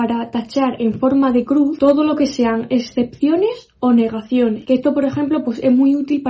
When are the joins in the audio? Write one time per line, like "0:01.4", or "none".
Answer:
none